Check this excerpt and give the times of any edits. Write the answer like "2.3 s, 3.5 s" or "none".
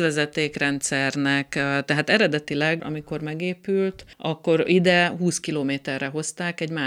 2.8 s, 4.1 s